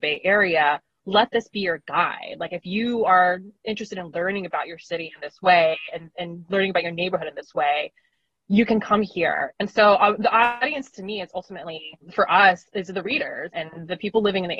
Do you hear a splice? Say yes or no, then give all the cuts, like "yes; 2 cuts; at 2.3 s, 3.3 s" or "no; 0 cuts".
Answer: yes; 2 cuts; at 9.5 s, 13.5 s